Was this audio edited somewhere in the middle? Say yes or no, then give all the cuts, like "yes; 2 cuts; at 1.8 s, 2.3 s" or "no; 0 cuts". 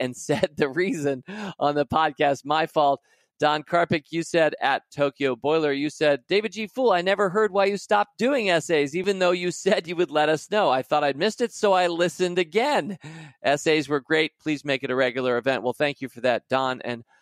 no; 0 cuts